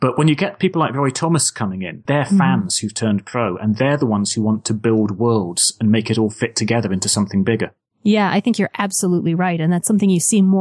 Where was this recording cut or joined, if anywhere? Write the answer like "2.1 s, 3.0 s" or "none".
2.1 s